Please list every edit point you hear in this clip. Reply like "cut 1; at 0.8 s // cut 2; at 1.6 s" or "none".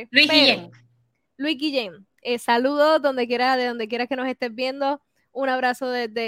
none